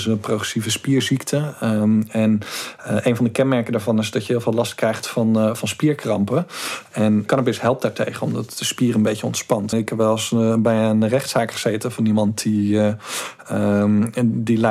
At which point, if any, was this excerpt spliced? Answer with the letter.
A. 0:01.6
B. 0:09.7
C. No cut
B